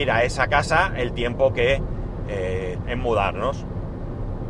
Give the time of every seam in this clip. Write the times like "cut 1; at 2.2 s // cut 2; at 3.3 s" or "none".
cut 1; at 2.8 s